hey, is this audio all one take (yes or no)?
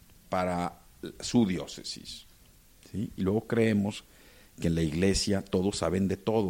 no